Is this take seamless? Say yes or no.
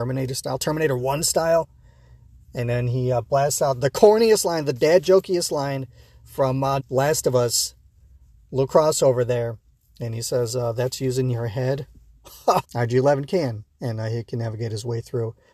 no